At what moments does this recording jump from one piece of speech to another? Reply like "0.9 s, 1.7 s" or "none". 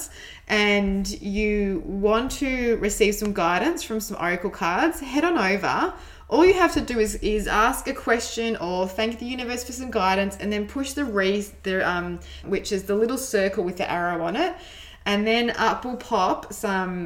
12.4 s